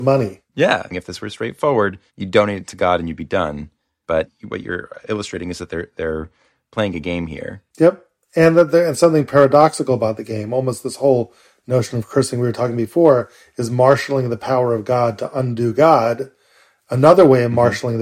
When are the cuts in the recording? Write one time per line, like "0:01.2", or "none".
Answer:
0:02.1
0:05.1